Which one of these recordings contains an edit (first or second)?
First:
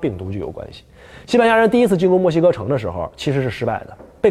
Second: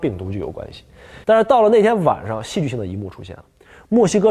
second